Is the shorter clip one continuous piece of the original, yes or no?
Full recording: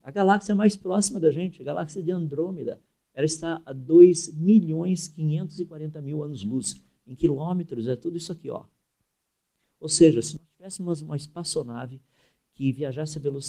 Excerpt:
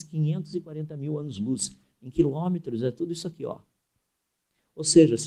yes